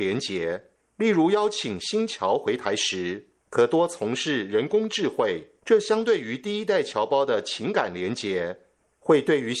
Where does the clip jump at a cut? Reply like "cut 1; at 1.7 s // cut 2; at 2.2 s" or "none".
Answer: cut 1; at 5.6 s